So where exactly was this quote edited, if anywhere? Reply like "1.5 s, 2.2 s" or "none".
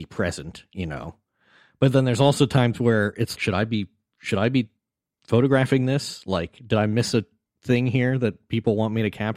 3.3 s